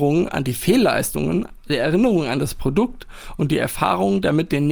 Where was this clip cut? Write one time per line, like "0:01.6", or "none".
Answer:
0:01.6